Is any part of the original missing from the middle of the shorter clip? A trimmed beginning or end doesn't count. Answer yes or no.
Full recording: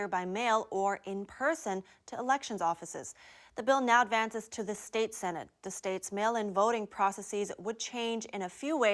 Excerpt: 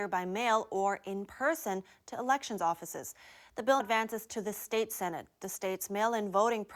yes